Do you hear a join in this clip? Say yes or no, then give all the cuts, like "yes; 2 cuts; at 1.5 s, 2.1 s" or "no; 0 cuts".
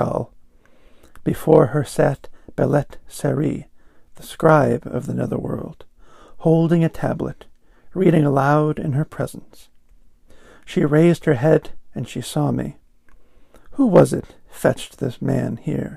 no; 0 cuts